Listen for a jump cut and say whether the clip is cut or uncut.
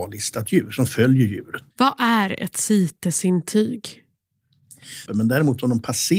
cut